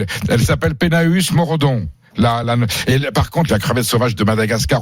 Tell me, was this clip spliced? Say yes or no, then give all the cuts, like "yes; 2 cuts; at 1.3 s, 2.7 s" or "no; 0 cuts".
yes; 2 cuts; at 2.4 s, 3.5 s